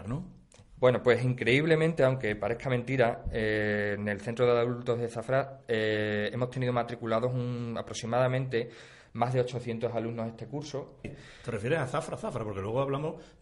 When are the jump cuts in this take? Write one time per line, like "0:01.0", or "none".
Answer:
0:11.0